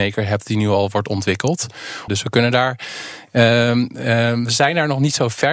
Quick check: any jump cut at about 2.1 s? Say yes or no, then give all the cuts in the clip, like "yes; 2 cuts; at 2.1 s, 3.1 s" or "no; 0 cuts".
yes; 1 cut; at 2.1 s